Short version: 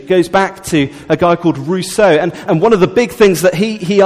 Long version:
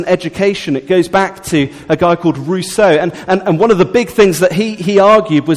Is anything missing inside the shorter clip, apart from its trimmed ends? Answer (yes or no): yes